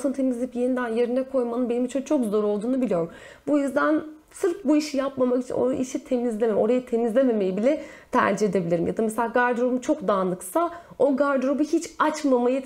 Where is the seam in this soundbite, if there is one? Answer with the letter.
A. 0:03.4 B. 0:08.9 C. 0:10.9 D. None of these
D